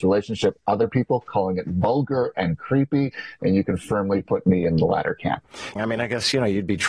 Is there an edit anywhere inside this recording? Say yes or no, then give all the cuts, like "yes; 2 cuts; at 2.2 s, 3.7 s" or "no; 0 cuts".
yes; 1 cut; at 5.8 s